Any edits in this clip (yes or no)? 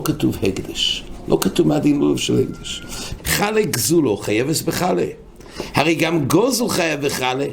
yes